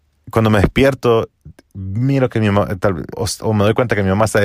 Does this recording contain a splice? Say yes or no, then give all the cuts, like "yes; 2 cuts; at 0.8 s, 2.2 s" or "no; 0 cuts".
yes; 1 cut; at 3.1 s